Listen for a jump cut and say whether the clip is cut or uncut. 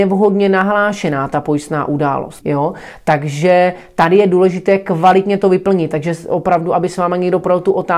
cut